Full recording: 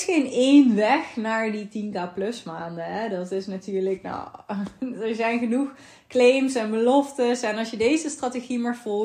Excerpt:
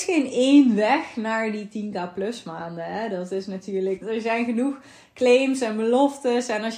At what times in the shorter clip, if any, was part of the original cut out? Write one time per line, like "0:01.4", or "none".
0:04.0